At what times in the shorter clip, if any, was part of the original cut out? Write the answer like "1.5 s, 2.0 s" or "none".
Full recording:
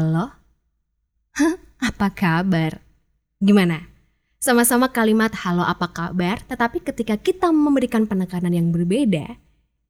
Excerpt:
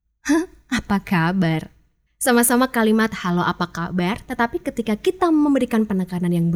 2.1 s